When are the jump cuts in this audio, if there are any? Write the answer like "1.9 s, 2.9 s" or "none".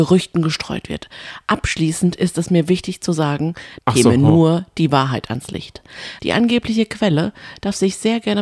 3.8 s, 6.2 s